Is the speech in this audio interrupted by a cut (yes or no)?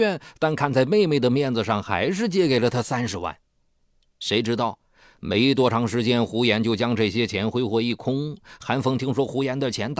no